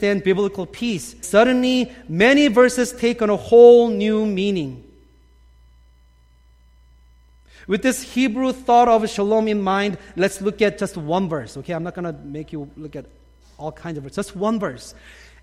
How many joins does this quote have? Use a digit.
1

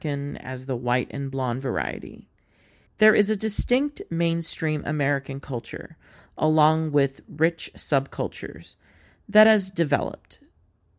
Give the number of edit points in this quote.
1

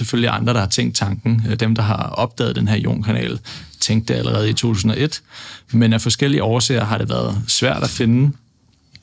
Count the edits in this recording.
0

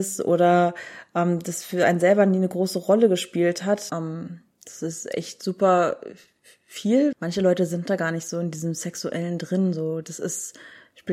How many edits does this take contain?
2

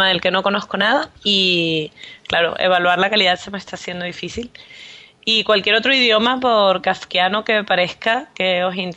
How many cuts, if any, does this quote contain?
1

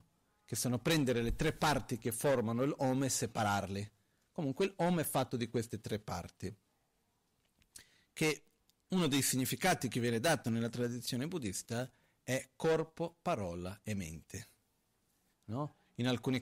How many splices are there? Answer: 1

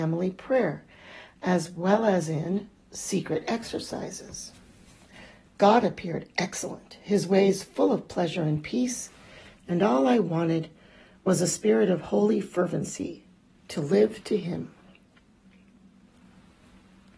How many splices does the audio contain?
0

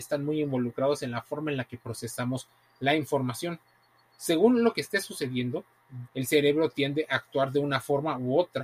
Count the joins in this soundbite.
1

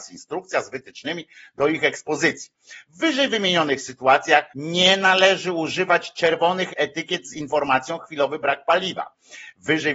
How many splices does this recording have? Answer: 2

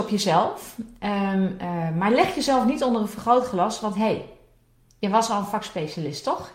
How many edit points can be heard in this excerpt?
0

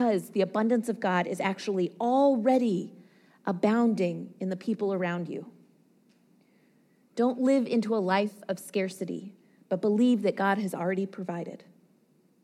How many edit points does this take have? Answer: 0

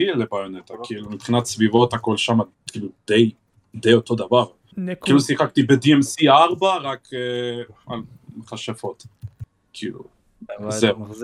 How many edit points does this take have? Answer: 1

